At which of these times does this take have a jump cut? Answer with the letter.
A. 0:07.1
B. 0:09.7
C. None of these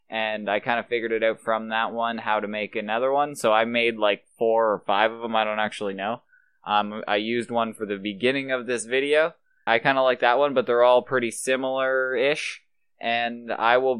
B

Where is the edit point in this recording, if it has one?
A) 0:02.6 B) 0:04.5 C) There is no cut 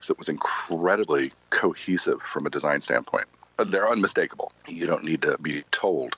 B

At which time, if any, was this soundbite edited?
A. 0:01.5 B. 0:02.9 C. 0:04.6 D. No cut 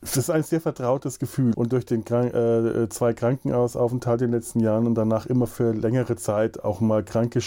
A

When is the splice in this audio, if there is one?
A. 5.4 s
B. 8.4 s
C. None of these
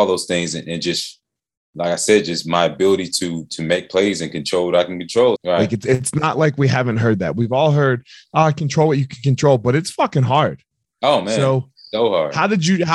A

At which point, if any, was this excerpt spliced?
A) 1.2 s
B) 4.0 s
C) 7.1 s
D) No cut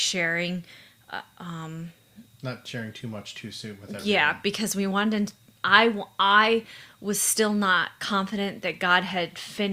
D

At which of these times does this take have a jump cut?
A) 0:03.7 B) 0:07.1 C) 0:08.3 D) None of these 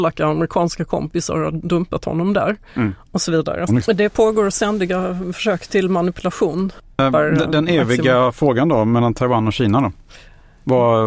A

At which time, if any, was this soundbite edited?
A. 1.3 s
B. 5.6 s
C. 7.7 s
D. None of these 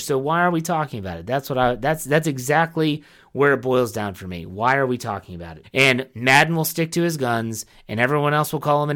B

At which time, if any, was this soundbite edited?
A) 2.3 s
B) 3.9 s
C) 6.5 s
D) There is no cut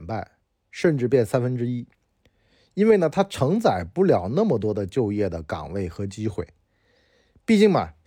D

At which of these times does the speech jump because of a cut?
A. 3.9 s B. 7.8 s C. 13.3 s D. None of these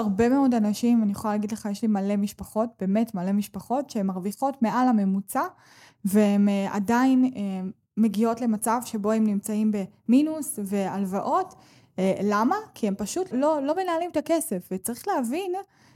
C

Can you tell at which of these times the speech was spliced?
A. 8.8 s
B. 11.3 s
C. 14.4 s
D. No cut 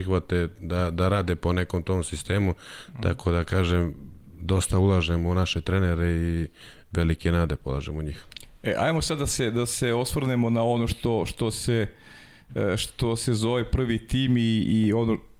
D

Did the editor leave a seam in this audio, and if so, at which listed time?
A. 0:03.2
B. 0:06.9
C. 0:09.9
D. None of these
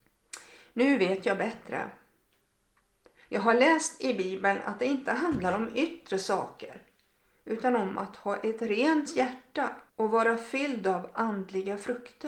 C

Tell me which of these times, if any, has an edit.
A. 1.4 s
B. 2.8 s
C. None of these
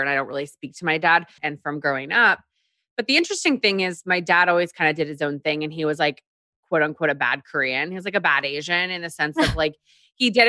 A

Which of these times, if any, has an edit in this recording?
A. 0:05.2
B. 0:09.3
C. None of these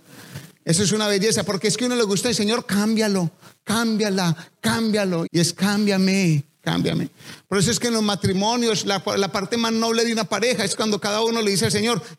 A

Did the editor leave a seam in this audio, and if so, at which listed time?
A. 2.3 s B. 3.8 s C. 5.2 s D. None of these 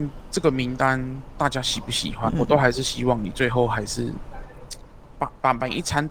A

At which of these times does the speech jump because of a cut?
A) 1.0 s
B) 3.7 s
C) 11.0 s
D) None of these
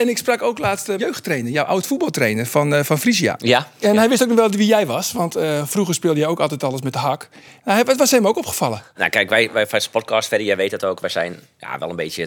A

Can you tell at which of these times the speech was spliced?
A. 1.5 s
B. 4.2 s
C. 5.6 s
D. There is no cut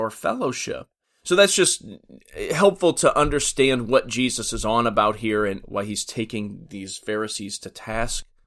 C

